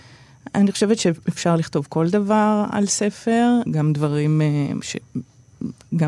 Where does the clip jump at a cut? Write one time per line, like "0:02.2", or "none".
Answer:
0:03.7
0:04.8